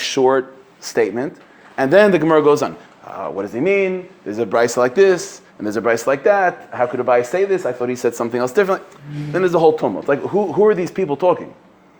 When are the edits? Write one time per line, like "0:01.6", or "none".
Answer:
none